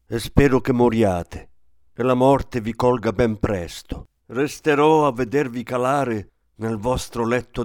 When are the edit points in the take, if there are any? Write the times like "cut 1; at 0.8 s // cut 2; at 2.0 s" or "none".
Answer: cut 1; at 4.2 s